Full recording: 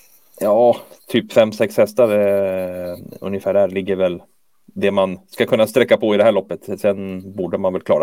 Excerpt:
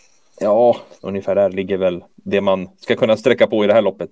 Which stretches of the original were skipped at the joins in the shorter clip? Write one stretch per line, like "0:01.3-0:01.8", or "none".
0:01.0-0:03.2
0:04.3-0:04.6